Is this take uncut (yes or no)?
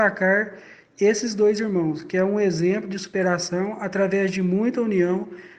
yes